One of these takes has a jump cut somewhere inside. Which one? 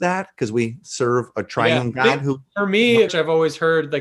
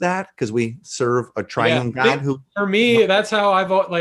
first; 1 cut; at 3.1 s

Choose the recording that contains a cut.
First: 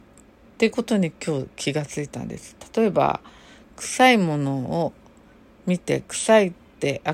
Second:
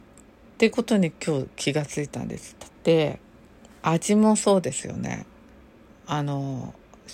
second; 1 cut; at 2.7 s

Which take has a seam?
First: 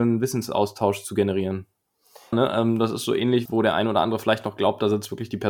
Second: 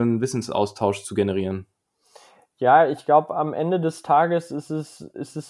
first; 2 cuts; at 2.3 s, 3.5 s

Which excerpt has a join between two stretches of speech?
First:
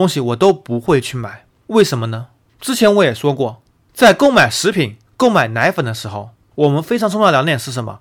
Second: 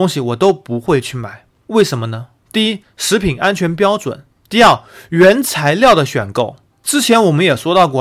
second; 2 cuts; at 2.4 s, 6.7 s

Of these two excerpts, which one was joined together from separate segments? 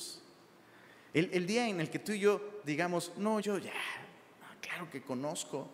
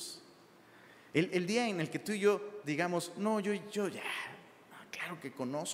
first; 1 cut; at 3.4 s

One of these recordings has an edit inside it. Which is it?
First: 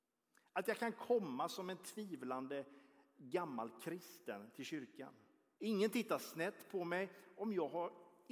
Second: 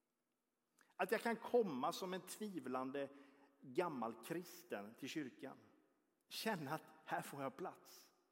first; 1 cut; at 5.6 s

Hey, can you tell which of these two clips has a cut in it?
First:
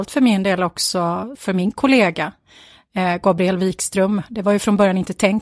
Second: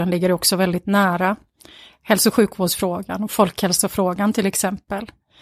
first; 1 cut; at 1.4 s

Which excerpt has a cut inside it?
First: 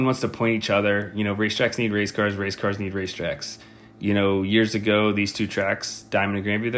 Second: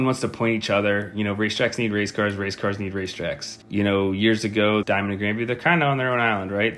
second; 2 cuts; at 3.6 s, 4.8 s

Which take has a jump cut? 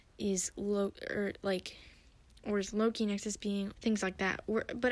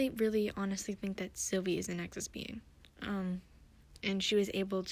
first; 1 cut; at 3.7 s

